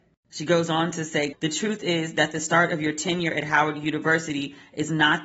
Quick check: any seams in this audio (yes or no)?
yes